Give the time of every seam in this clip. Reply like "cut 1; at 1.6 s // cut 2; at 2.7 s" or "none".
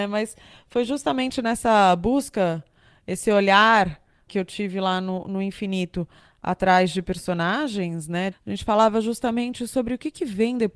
cut 1; at 4.3 s // cut 2; at 8.3 s